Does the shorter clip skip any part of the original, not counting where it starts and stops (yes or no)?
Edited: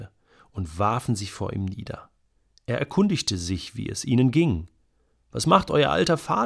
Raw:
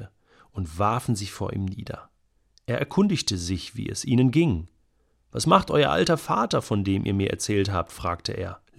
no